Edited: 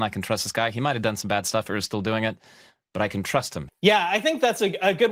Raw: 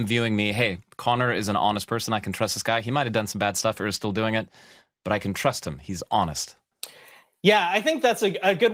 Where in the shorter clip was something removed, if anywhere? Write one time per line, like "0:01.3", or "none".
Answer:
0:03.7